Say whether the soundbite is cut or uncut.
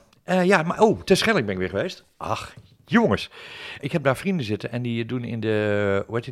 cut